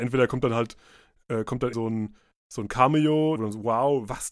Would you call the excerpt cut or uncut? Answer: cut